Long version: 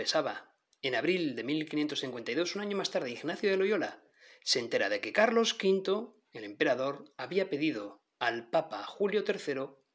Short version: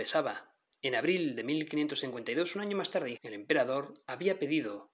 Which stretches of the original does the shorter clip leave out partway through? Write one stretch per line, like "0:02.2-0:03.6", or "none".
0:03.1-0:06.2